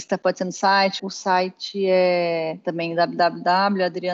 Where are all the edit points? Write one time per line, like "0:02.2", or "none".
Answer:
0:01.0